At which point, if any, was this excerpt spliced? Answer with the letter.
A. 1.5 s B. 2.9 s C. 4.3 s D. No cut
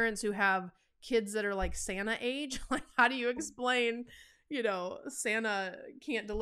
D